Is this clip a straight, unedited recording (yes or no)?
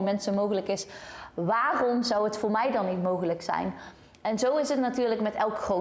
yes